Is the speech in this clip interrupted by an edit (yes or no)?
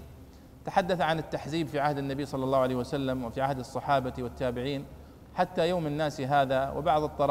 no